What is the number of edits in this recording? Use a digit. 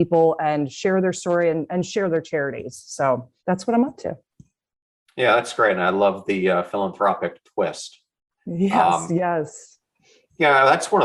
1